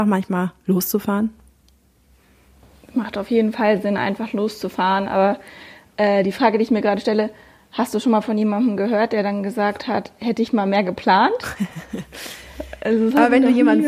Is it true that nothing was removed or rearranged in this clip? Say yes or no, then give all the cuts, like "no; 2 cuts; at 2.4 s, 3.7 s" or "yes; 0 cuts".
yes; 0 cuts